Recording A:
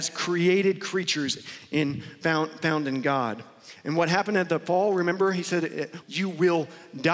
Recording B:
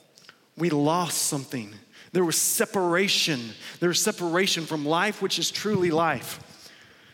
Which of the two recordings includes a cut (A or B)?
A